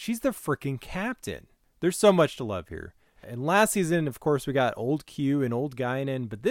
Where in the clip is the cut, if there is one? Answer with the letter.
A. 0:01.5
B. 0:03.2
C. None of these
B